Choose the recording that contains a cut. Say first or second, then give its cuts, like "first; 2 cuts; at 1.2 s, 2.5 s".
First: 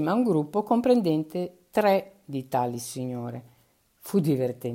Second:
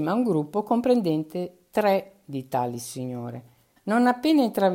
second; 1 cut; at 3.8 s